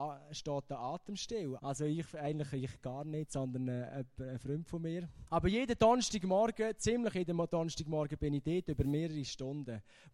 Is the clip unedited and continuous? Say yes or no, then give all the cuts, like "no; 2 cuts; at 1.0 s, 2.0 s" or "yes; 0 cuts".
no; 2 cuts; at 1.6 s, 5.3 s